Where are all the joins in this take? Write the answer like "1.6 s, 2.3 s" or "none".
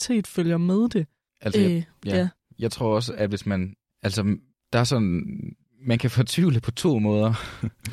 1.3 s